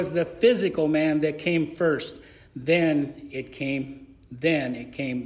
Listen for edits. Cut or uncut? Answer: uncut